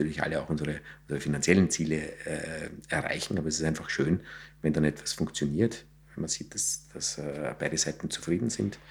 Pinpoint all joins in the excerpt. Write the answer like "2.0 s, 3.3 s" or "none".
none